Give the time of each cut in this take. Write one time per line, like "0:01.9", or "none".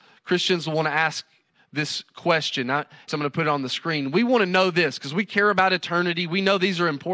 0:03.1